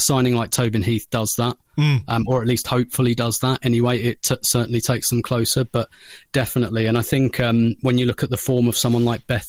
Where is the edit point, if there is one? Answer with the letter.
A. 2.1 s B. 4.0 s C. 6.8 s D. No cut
D